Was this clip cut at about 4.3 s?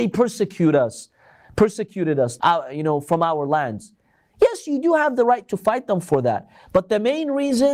no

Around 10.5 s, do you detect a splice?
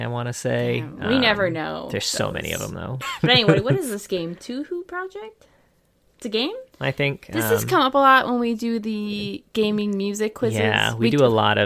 no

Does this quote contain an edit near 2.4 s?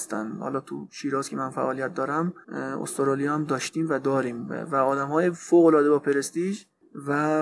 yes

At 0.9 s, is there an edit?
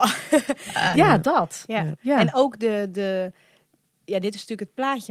yes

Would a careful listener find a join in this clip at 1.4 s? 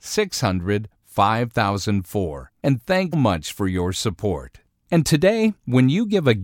no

